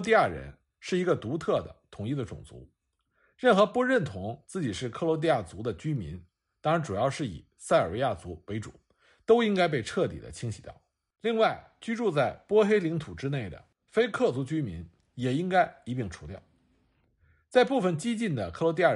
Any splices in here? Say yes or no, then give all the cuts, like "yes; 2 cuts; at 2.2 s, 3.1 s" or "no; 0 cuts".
no; 0 cuts